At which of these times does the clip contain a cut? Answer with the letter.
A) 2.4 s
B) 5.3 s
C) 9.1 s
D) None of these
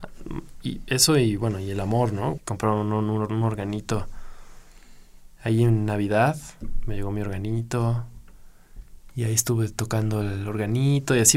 A